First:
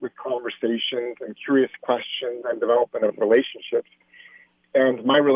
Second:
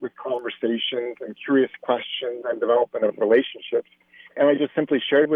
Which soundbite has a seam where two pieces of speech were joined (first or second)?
second